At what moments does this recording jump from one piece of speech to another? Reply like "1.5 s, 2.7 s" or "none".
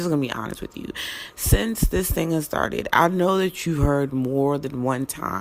none